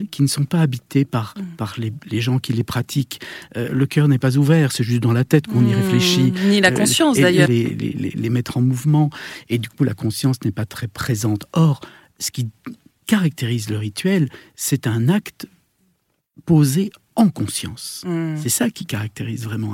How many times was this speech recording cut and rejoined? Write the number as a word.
one